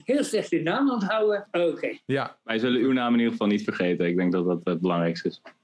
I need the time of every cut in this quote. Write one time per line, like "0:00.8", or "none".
0:01.5